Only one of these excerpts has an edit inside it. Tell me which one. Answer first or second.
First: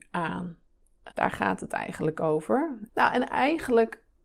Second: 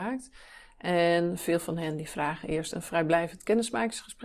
first